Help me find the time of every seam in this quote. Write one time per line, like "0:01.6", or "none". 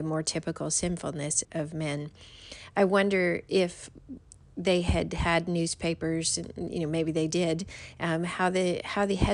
0:01.4